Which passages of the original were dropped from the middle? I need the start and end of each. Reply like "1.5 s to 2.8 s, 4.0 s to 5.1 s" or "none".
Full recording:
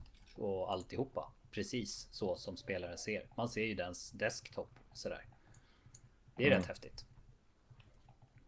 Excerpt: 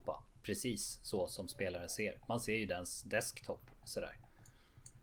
none

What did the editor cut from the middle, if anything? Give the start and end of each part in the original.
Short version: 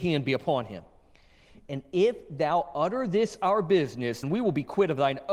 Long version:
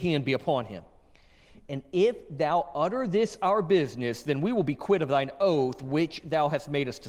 4.2 s to 4.3 s

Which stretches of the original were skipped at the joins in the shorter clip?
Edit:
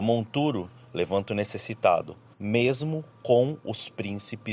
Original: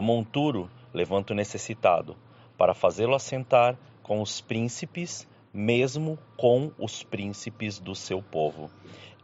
2.3 s to 5.5 s

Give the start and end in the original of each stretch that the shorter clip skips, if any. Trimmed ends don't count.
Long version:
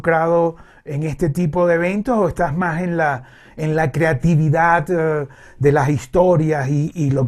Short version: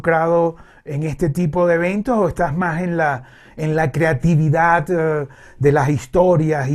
none

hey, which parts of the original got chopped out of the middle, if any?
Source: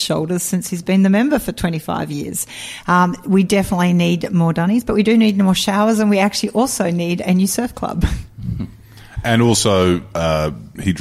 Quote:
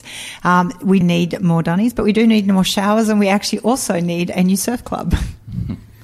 3.4 s to 3.9 s

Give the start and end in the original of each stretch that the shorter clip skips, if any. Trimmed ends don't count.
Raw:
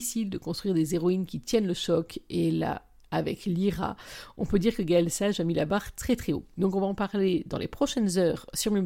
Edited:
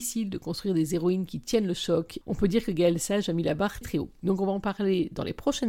2.2 s to 4.3 s, 5.9 s to 6.2 s

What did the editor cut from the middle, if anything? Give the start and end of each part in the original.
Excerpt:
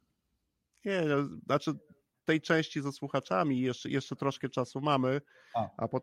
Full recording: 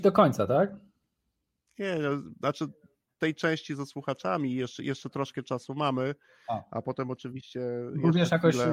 none

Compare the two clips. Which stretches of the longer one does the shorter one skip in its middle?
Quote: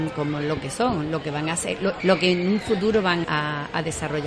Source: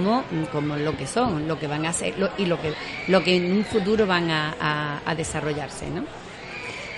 2.4 s to 3.0 s, 4.3 s to 4.6 s

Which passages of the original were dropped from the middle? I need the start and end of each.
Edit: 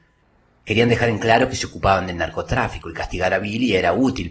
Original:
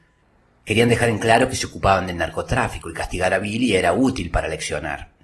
none

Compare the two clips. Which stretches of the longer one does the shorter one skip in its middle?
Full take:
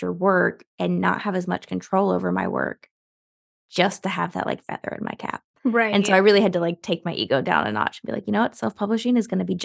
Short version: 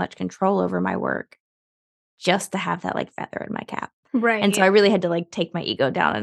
none

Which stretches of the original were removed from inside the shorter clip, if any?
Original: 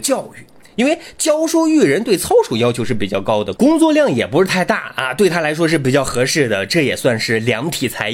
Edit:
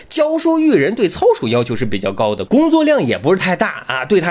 none

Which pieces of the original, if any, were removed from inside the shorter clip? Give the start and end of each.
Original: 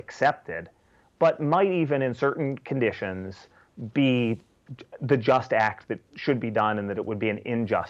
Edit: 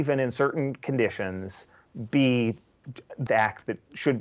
5.1 s to 5.5 s

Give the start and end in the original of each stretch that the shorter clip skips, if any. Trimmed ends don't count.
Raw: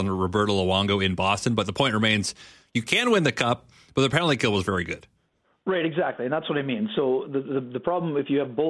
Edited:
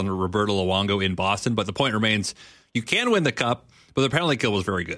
none

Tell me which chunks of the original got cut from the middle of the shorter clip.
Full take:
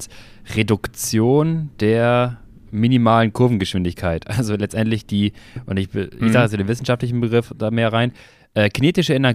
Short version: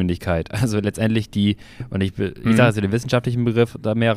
none

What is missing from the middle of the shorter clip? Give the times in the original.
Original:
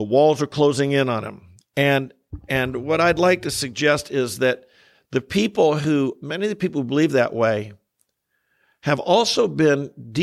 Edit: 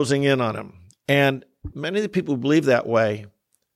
2.4 s to 6.2 s

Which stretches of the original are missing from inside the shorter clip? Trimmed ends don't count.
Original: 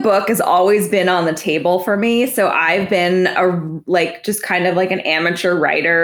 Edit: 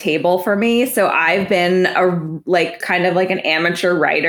4.2 s to 4.4 s

